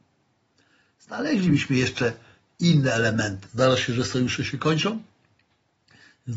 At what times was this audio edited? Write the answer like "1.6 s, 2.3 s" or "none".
3.5 s